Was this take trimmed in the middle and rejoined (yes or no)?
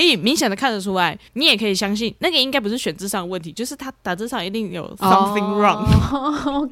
yes